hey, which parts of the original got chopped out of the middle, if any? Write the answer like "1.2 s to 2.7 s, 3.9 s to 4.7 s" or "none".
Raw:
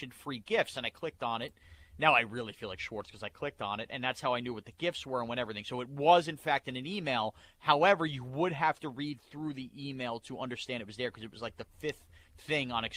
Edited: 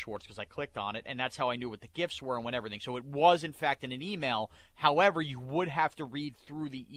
none